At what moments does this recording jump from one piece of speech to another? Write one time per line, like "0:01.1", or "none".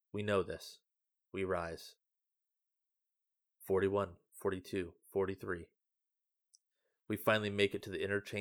none